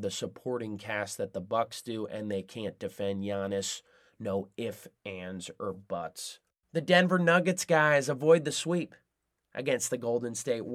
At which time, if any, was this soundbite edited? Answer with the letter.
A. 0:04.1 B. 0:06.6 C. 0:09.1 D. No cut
D